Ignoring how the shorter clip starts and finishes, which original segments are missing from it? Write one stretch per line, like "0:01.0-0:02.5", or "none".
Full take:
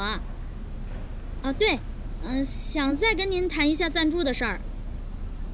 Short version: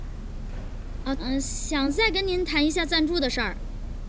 0:01.5-0:02.2